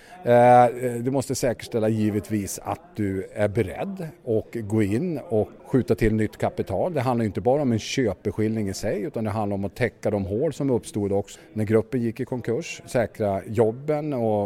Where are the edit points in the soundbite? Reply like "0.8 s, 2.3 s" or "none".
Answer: 5.6 s, 11.4 s